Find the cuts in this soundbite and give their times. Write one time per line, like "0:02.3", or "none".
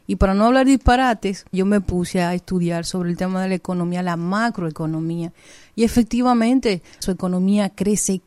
0:01.5
0:07.0

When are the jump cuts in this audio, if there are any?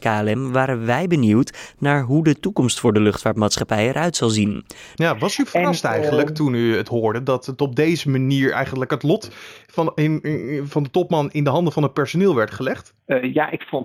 0:04.9

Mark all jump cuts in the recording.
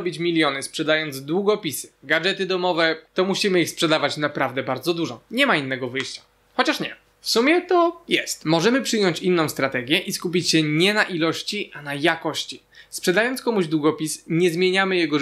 0:03.1

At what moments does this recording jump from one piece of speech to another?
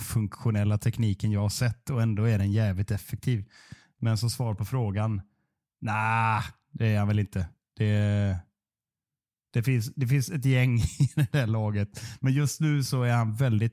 none

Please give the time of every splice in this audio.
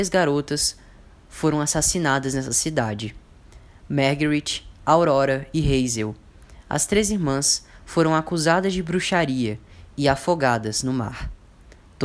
none

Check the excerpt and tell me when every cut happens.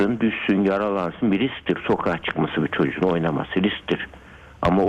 none

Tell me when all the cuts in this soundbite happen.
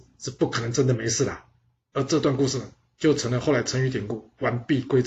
0:01.8

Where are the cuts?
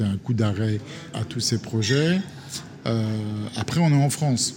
0:01.1

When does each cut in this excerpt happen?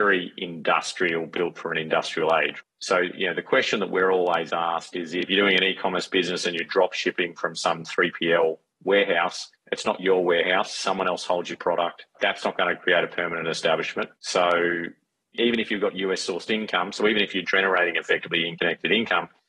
0:14.2

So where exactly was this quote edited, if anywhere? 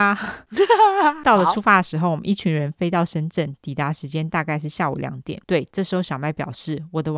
0:05.4

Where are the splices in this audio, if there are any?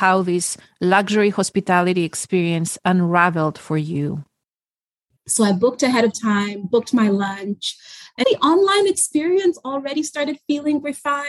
0:05.2
0:08.2

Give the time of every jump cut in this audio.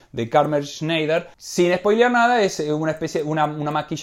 none

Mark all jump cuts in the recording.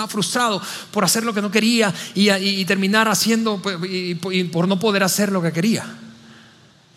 none

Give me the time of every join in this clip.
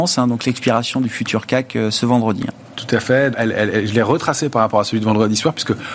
0:03.3

